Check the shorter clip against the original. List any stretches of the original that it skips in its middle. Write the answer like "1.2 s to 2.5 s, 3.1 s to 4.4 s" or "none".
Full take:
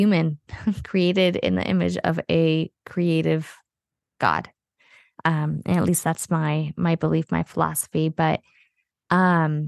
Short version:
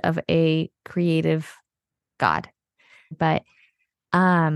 5.1 s to 8.1 s